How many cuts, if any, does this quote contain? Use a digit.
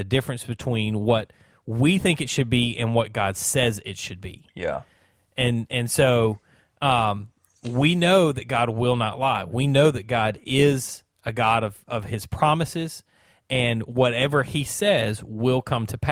0